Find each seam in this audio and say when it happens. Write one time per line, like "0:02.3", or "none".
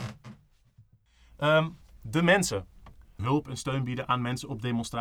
0:03.2